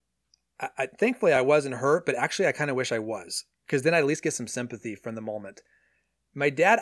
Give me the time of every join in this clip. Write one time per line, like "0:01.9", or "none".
none